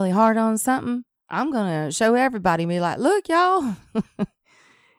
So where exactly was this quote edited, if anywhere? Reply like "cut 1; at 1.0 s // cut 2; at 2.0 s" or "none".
none